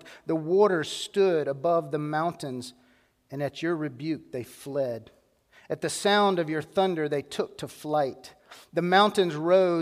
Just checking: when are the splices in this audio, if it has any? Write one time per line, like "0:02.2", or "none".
none